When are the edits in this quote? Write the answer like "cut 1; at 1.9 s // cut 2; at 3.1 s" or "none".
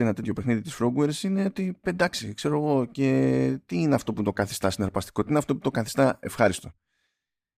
none

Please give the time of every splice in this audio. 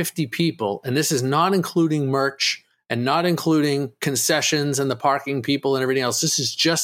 none

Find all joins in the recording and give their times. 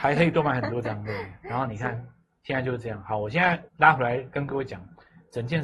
cut 1; at 3.7 s

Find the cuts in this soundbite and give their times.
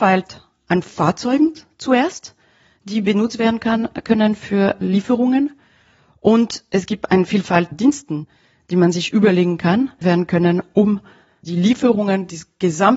cut 1; at 7.7 s // cut 2; at 10.0 s

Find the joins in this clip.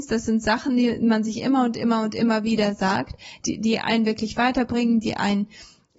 cut 1; at 3.4 s

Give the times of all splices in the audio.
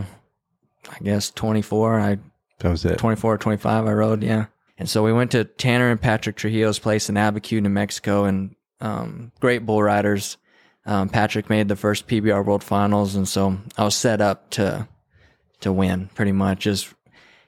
cut 1; at 4.7 s

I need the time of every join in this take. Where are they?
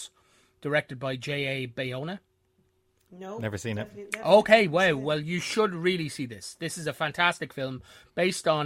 none

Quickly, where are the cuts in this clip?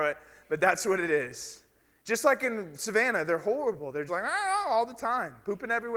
cut 1; at 4.1 s

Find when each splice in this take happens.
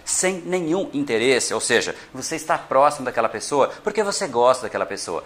none

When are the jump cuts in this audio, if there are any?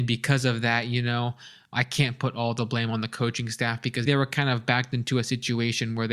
cut 1; at 1.7 s // cut 2; at 4.1 s

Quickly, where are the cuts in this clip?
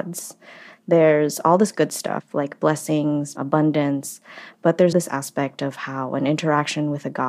cut 1; at 3.4 s // cut 2; at 4.9 s

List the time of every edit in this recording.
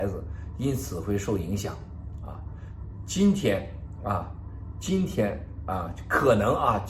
none

